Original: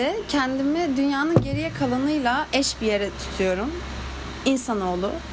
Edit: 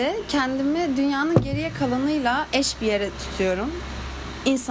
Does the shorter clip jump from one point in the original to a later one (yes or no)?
no